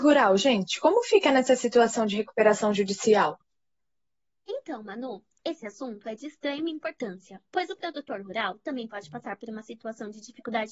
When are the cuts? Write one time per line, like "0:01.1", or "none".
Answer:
none